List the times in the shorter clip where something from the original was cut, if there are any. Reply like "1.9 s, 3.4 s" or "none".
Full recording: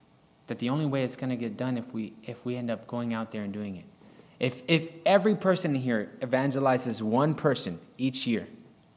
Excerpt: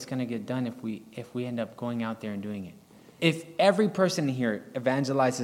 3.2 s

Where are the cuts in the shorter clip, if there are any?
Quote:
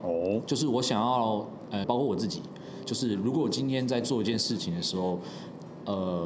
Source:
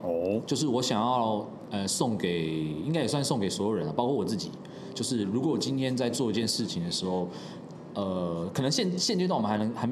1.8 s

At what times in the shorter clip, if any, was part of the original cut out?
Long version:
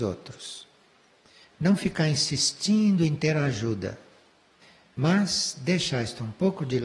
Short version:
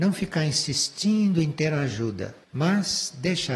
2.4 s

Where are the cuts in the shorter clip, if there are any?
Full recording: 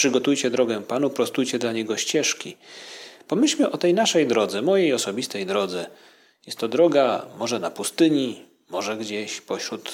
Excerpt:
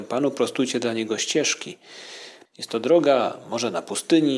2.5 s

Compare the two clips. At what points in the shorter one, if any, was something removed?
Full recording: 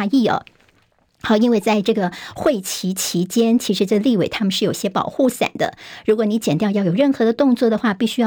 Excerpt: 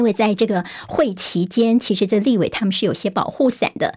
1.1 s

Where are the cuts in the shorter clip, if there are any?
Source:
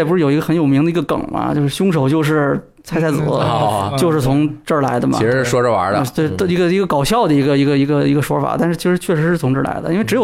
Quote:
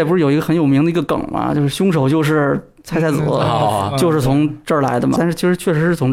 5.2 s

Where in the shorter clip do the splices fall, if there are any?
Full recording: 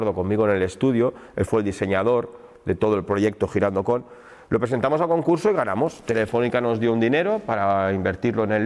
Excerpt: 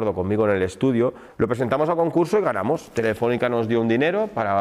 1.3 s

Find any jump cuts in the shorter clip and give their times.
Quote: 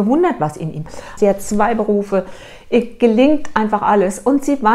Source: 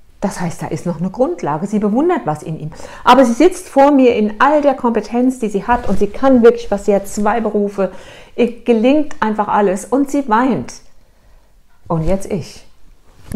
1.2 s

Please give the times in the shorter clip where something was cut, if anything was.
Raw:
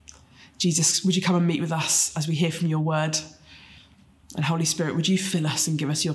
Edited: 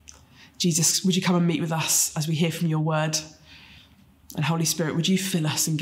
none

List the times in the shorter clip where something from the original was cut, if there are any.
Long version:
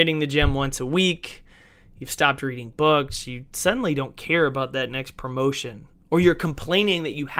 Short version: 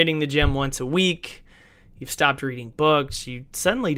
none

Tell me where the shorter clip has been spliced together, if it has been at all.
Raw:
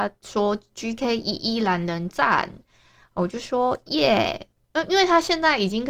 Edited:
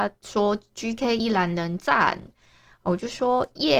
1.2 s

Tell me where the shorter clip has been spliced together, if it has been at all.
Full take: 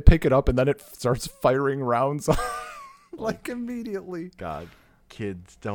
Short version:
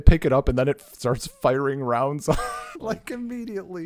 2.7 s

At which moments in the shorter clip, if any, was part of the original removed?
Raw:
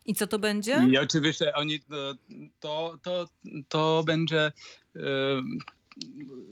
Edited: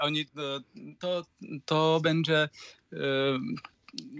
1.0 s

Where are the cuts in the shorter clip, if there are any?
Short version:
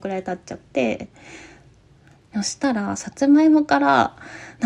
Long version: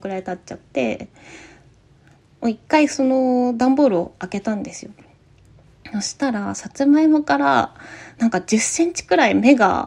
2.3 s

